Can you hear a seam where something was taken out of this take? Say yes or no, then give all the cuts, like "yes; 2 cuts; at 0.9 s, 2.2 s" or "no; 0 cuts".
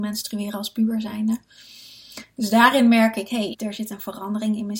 yes; 1 cut; at 3.5 s